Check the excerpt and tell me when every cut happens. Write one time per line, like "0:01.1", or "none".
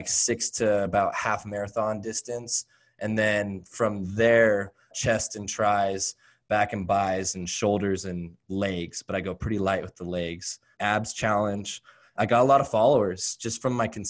0:04.9
0:10.7
0:12.2